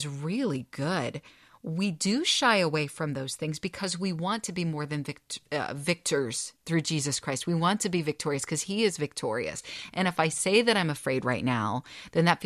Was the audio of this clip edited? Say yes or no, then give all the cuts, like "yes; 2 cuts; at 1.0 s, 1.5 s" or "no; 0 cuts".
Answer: no; 0 cuts